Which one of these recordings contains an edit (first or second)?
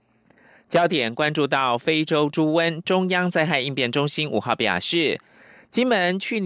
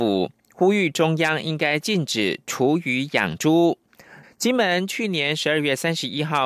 second